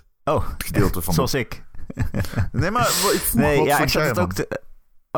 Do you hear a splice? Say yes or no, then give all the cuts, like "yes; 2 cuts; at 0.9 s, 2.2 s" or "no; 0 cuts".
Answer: no; 0 cuts